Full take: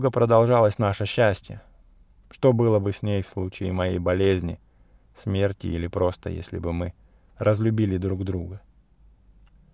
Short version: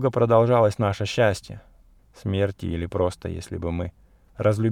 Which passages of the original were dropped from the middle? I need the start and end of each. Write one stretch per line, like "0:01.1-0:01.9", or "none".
0:02.0-0:05.0